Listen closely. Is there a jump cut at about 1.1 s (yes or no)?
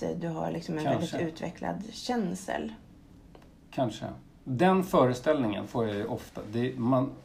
no